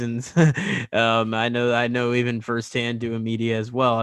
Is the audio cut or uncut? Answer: uncut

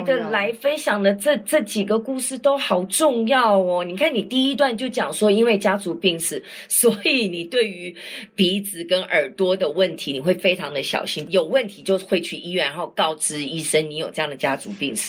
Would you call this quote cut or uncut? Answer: uncut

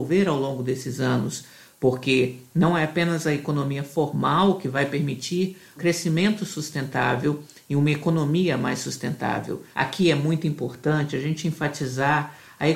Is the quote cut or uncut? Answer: cut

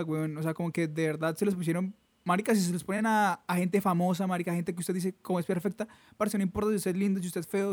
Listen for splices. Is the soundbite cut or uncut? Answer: uncut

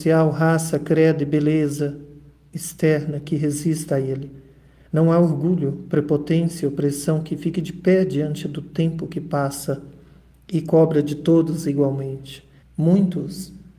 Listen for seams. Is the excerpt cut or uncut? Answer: cut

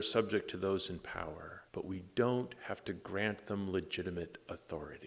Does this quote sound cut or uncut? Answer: cut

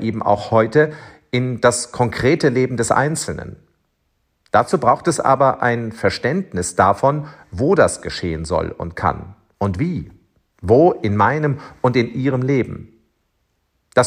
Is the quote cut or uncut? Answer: uncut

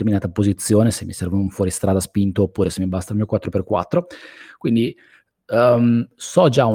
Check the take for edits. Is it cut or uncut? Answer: uncut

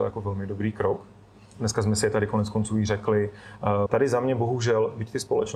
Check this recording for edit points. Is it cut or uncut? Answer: cut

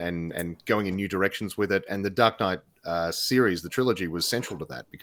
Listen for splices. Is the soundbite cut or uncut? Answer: uncut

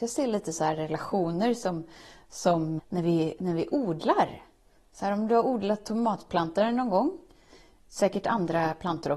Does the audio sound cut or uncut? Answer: cut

